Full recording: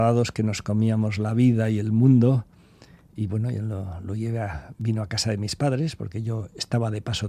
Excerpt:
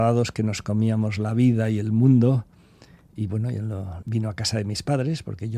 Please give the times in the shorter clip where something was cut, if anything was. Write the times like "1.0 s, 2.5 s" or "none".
4.0 s

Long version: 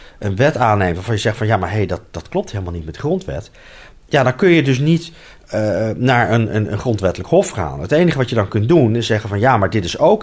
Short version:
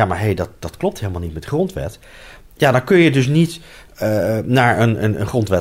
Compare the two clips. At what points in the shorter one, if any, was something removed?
none

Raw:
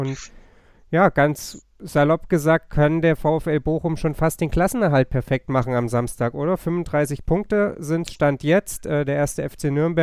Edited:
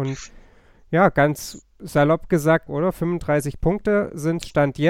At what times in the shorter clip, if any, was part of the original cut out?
2.7 s

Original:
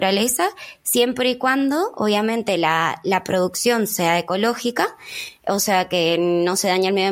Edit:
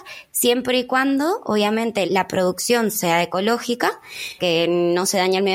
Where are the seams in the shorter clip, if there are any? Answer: 2.1 s, 4.4 s

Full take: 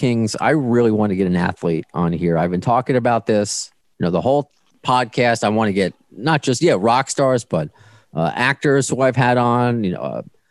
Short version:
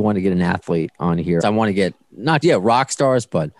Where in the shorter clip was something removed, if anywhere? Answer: 1.4 s, 2.4 s

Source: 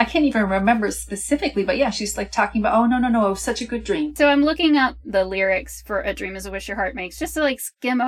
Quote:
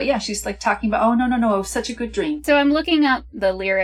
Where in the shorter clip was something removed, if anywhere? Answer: none

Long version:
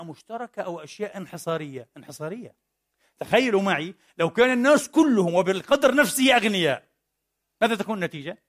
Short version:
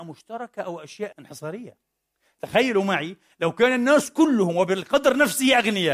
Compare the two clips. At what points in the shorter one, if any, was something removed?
1.1 s

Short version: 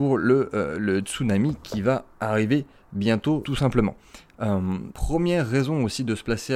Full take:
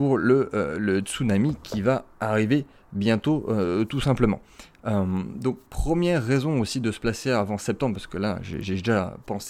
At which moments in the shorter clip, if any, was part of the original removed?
3.4 s, 4.9 s

